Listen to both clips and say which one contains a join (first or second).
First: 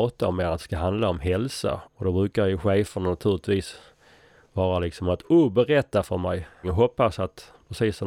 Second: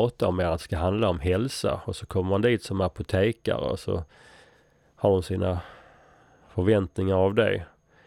first